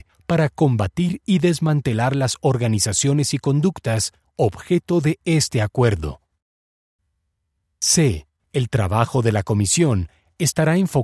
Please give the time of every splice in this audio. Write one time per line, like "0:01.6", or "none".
0:08.4